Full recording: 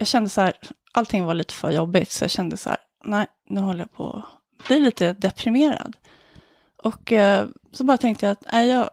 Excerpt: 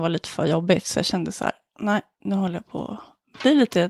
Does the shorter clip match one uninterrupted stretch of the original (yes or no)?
yes